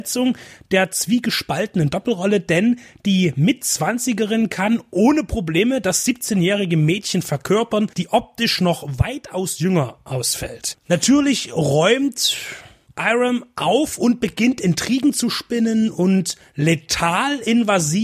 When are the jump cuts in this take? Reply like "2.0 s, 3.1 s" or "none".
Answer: 10.7 s